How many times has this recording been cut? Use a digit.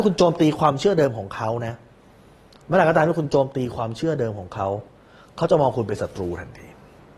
0